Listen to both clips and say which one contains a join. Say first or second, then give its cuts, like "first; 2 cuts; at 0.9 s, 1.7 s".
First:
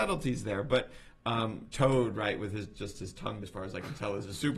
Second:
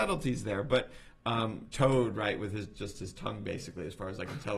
first; 1 cut; at 3.4 s